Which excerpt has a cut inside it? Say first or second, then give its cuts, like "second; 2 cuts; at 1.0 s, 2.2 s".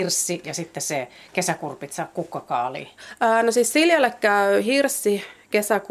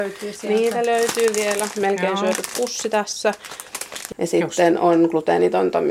second; 1 cut; at 4.1 s